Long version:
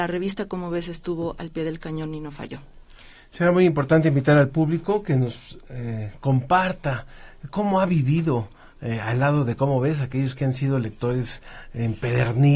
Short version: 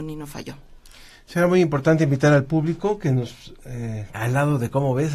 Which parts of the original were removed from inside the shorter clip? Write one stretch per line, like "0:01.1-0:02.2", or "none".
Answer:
0:06.2-0:09.0